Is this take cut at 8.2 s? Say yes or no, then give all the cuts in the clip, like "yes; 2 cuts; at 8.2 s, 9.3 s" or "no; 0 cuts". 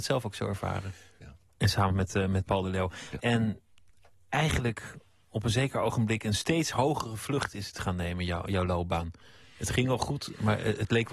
no; 2 cuts; at 1.2 s, 3.2 s